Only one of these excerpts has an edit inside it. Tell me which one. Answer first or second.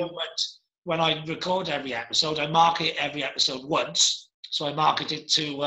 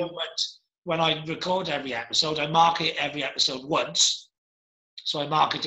first